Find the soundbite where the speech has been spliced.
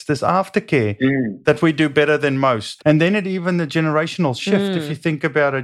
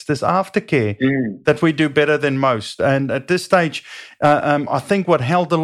first; 1 cut; at 2.8 s

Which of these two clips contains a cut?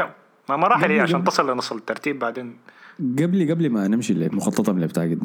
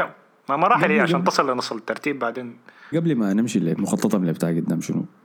second; 1 cut; at 2.9 s

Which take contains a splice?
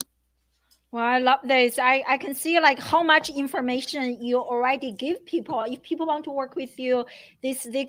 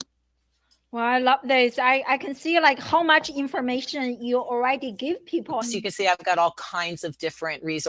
second; 1 cut; at 5.6 s

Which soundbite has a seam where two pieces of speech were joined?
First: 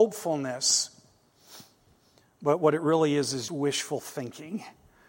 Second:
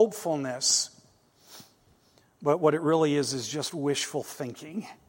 first; 1 cut; at 3.5 s

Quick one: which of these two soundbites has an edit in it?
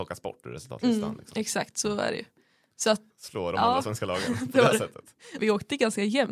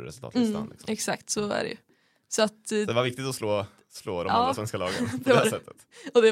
first; 2 cuts; at 3.1 s, 5.4 s

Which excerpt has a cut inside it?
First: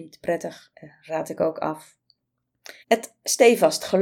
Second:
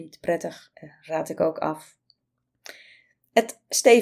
first; 1 cut; at 2.8 s

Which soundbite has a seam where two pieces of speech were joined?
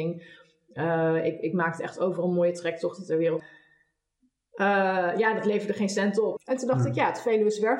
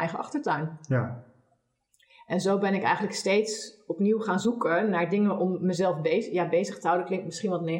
first; 2 cuts; at 3.4 s, 6.4 s

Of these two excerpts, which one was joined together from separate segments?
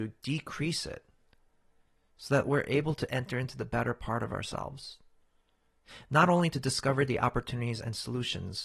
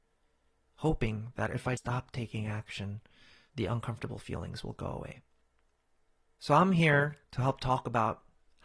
second; 2 cuts; at 1.8 s, 7.2 s

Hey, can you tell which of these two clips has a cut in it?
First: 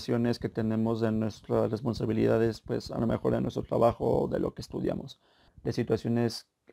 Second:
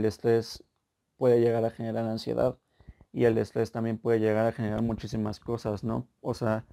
first; 1 cut; at 5.5 s

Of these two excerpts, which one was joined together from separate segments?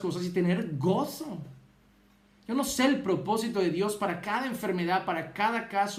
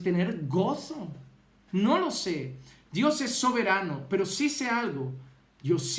second; 1 cut; at 1.7 s

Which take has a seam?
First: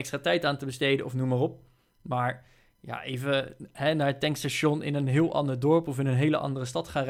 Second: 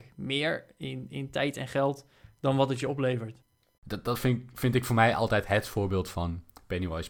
second; 1 cut; at 3.8 s

